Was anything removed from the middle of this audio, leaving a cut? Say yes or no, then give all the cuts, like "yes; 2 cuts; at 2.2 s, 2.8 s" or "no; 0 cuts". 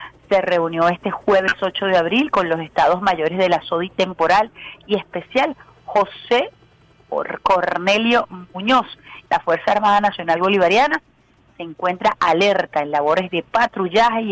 yes; 1 cut; at 9.3 s